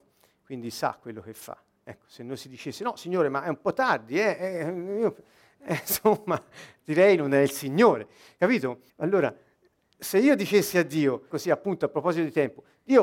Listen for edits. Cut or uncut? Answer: cut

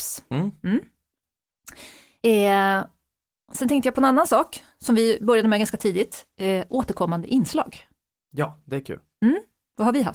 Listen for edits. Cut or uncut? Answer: uncut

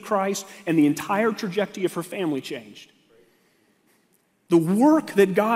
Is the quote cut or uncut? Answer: cut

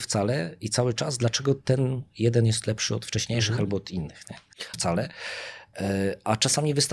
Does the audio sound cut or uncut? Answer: cut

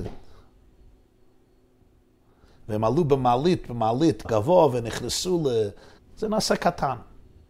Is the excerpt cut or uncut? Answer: cut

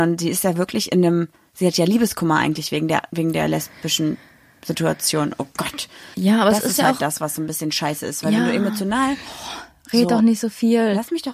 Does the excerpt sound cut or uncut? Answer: cut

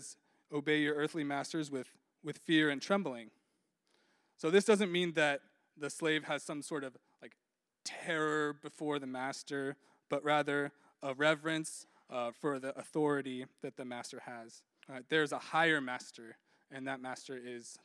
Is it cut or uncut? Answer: cut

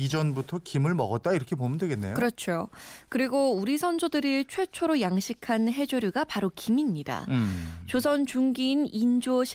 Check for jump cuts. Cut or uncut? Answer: uncut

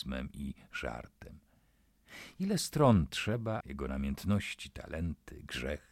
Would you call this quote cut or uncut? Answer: cut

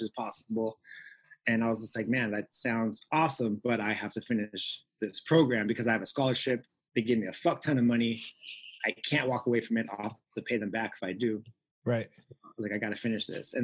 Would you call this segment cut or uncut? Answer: uncut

